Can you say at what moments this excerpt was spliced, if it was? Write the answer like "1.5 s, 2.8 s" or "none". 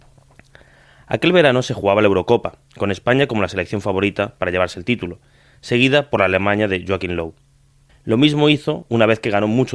2.7 s, 7.9 s